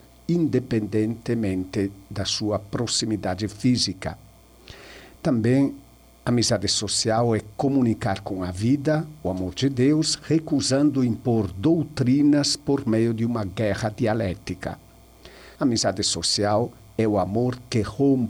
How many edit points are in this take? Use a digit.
1